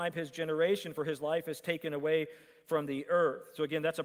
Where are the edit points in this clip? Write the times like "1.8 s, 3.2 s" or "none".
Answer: none

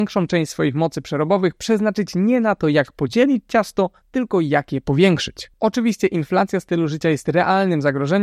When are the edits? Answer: none

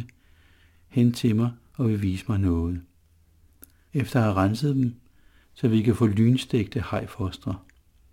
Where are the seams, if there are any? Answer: 3.9 s, 5.4 s

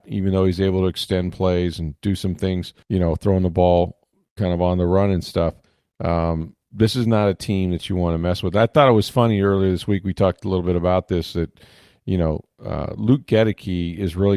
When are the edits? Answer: 2.8 s

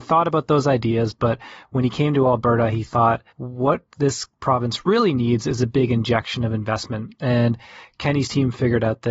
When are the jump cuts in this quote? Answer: 3.3 s

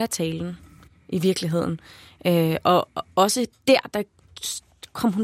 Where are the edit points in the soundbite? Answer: none

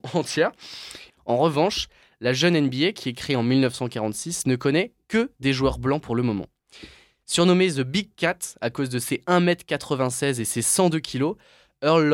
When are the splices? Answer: 1.1 s

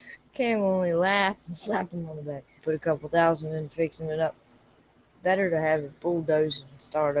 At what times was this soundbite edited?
2.6 s

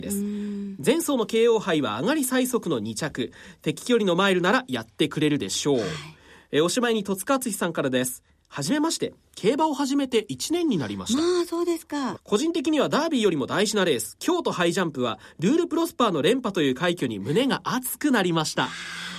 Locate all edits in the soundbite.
12.2 s

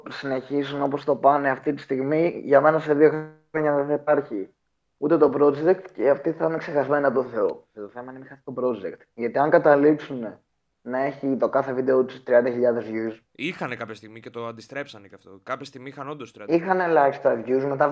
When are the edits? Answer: 7.7 s

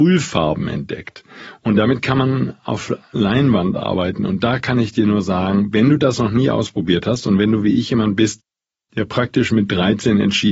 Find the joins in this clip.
none

